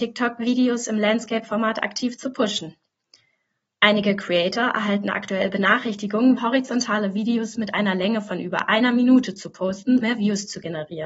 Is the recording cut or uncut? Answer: cut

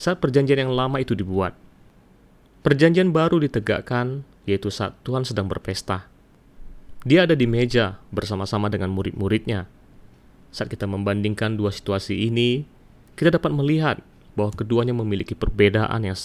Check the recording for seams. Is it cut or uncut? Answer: uncut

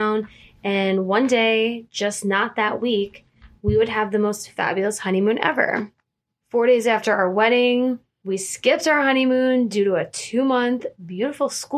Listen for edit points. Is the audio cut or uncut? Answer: cut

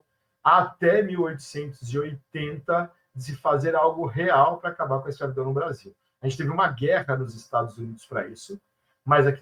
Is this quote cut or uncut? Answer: uncut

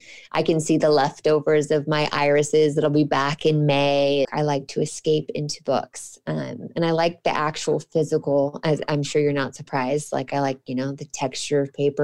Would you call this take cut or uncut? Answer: cut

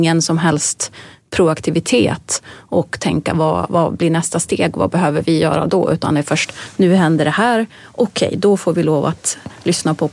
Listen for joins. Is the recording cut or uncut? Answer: uncut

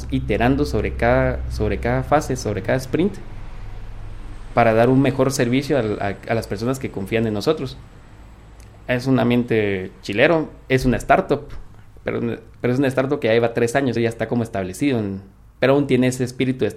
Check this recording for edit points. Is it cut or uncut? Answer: cut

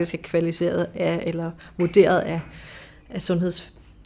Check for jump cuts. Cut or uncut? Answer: uncut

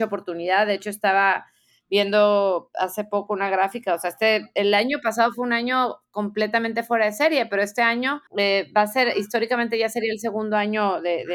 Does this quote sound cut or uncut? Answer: cut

